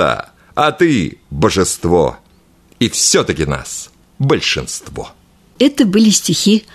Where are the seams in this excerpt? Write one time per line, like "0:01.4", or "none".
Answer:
none